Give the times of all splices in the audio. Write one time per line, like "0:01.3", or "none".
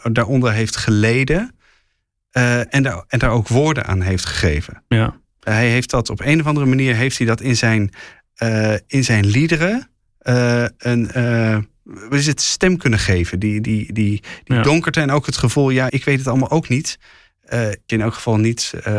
0:15.9
0:17.9